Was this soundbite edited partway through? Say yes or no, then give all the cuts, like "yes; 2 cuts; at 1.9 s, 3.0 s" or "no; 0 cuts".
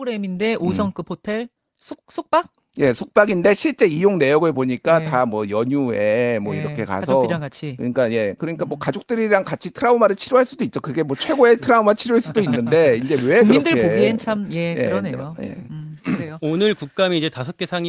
no; 0 cuts